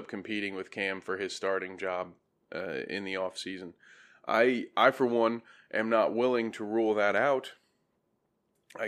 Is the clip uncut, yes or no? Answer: yes